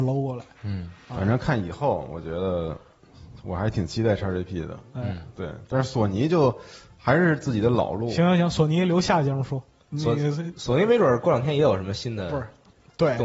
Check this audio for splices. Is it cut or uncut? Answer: uncut